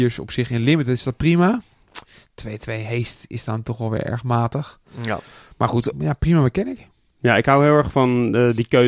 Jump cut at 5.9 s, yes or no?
yes